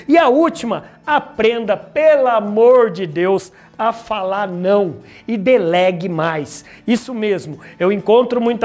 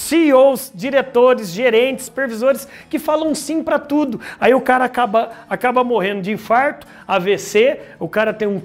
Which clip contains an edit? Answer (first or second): second